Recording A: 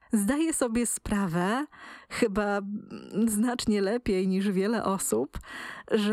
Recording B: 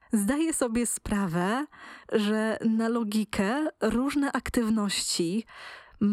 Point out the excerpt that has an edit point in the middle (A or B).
B